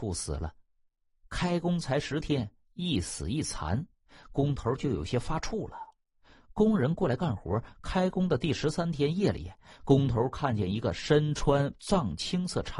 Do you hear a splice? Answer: no; 0 cuts

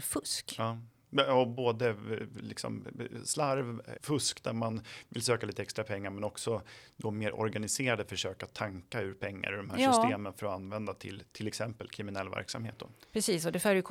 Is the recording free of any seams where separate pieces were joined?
no; 1 cut; at 4.0 s

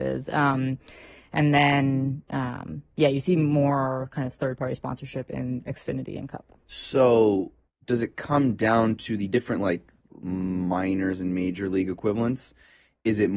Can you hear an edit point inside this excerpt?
yes; 1 cut; at 7.7 s

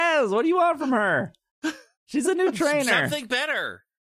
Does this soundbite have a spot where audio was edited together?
no; 0 cuts

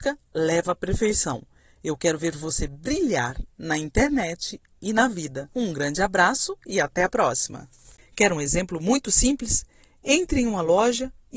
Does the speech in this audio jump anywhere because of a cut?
no; 0 cuts

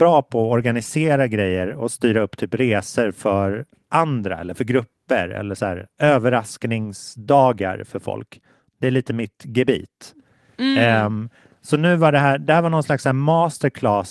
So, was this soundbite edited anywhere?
no; 0 cuts

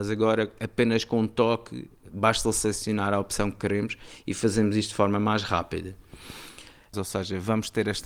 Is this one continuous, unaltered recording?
no; 1 cut; at 6.9 s

